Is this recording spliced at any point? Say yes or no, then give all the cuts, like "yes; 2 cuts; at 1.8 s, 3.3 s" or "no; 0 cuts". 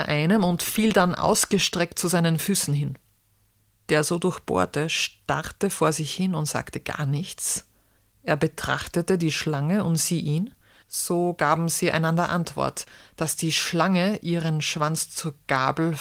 yes; 1 cut; at 10.8 s